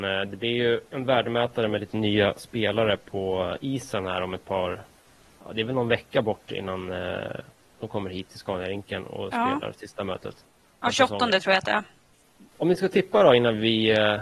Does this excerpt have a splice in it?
no; 0 cuts

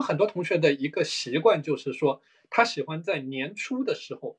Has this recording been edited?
no; 0 cuts

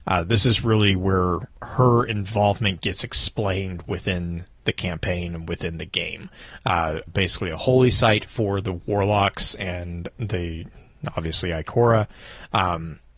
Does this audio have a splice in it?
yes; 1 cut; at 7.1 s

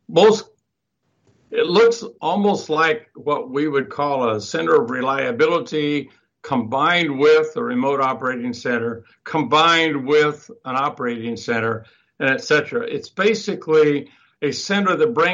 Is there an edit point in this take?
no; 0 cuts

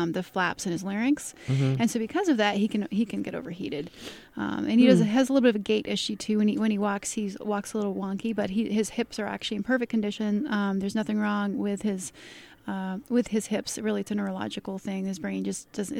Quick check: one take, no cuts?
yes; 0 cuts

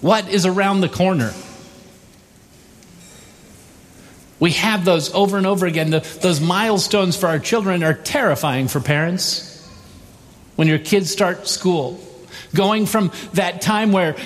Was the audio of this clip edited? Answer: no; 0 cuts

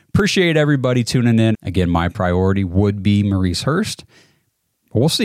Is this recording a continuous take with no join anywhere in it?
no; 1 cut; at 1.5 s

